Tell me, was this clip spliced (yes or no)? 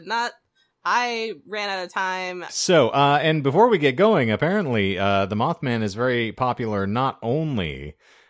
yes